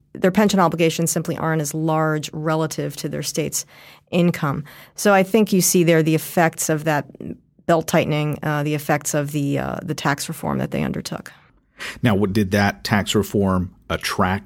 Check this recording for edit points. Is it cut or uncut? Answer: uncut